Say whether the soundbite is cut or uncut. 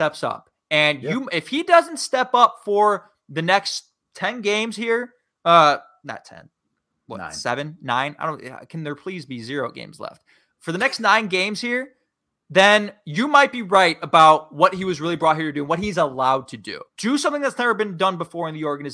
cut